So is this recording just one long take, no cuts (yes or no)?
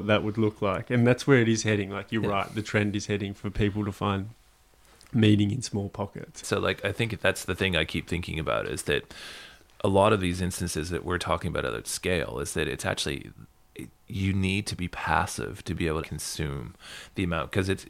no